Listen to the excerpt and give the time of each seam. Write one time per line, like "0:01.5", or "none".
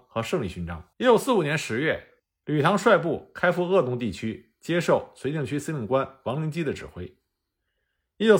0:00.9
0:02.4